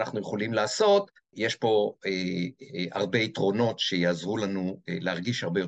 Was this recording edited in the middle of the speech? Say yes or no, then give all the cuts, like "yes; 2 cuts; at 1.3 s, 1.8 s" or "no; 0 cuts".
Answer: yes; 1 cut; at 1.3 s